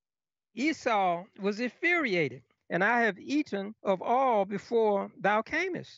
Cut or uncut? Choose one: cut